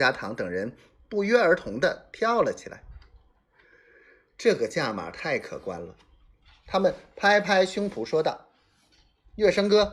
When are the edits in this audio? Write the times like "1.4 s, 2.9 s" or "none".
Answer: none